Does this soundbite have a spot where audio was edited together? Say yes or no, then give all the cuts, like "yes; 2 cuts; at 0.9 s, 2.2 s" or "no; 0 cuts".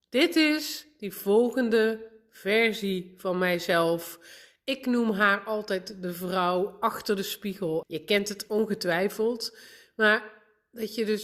yes; 1 cut; at 7.8 s